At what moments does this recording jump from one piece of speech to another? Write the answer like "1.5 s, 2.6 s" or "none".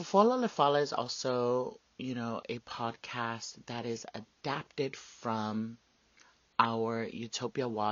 none